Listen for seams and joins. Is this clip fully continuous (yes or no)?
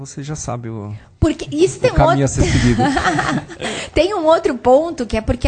yes